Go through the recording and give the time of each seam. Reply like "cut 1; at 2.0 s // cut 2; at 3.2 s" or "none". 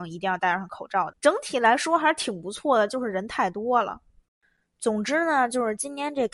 cut 1; at 1.1 s